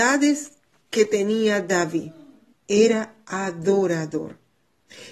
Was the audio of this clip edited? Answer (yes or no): yes